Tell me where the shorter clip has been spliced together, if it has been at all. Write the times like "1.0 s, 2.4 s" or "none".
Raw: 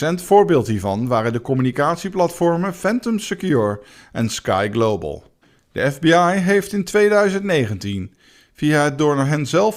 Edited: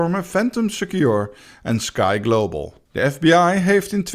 2.9 s